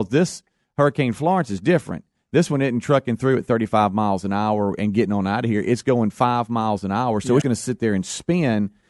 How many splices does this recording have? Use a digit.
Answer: 1